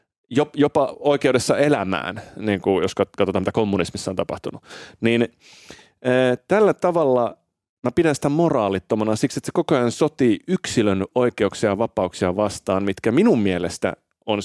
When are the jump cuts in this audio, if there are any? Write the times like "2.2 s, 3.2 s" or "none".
none